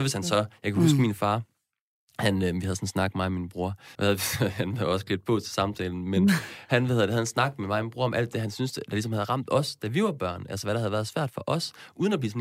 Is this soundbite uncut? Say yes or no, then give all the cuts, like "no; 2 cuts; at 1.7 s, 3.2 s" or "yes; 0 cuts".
no; 1 cut; at 4.0 s